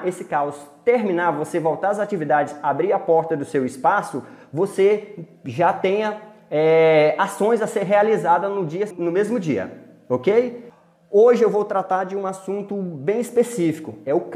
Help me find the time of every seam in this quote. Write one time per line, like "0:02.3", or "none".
0:08.9